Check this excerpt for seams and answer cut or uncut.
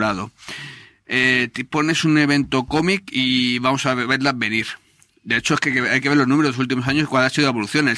uncut